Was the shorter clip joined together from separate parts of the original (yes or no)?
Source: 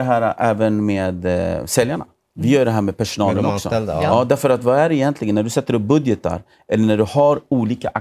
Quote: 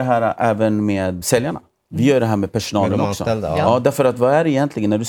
yes